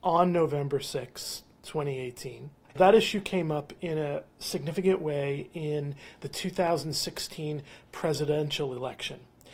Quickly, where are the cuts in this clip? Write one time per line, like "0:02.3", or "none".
0:02.6